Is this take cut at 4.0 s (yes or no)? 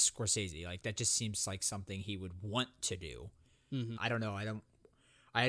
yes